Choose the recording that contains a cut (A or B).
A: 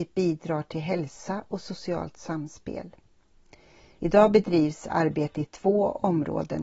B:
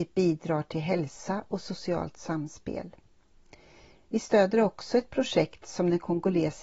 A